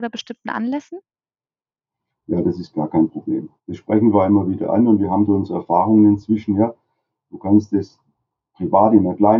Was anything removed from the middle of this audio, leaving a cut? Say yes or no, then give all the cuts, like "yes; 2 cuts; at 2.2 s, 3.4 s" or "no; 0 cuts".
yes; 1 cut; at 3.6 s